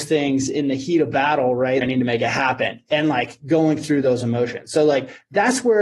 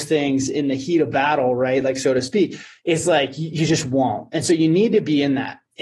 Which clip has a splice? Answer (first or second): first